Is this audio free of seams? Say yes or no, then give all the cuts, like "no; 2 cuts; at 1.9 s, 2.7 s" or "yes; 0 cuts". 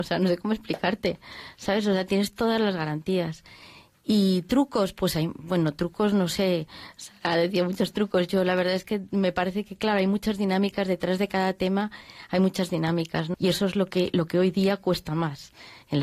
no; 1 cut; at 13.3 s